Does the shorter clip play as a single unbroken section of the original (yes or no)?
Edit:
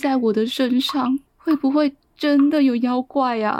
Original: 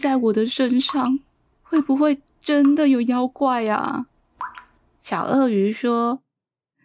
no